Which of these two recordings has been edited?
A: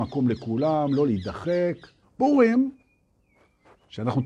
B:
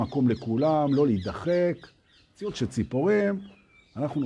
A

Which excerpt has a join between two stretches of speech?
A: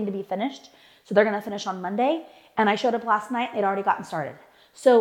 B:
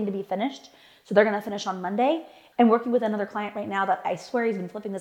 B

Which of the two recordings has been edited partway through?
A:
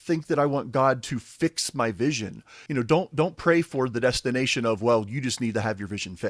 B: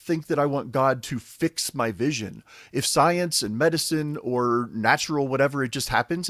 A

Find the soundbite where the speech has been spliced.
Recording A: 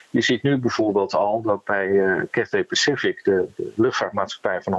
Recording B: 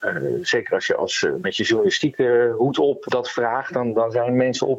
B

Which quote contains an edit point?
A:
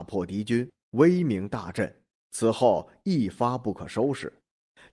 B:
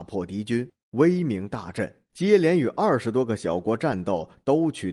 B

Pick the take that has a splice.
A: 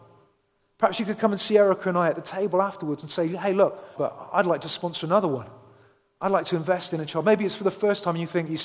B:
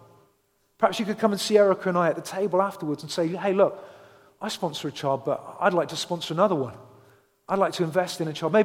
A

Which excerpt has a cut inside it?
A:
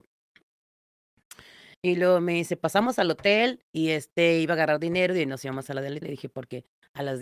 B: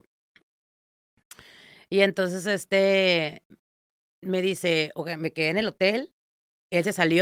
A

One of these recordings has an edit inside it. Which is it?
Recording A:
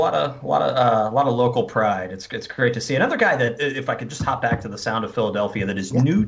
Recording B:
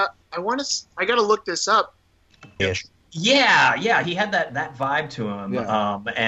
B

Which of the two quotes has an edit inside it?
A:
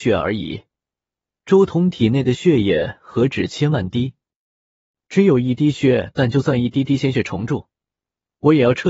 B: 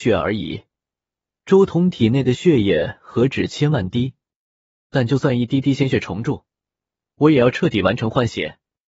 B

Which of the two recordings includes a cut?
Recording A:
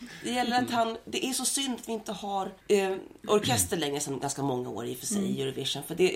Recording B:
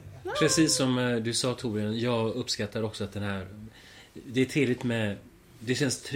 A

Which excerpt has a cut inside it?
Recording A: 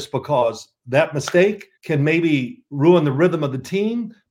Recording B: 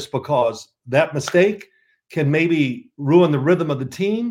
A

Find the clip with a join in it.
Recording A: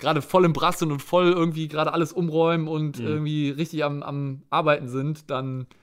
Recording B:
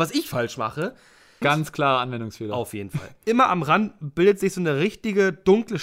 B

